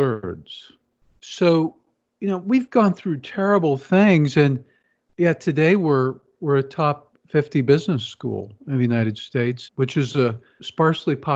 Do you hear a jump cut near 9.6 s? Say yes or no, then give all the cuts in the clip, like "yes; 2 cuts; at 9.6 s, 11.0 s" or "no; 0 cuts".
yes; 2 cuts; at 7.1 s, 9.6 s